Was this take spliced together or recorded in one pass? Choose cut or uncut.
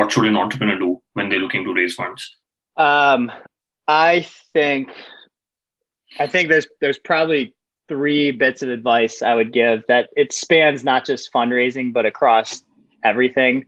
uncut